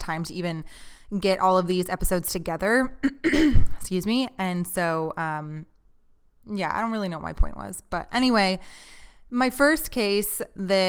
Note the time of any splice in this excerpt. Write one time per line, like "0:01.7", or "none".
none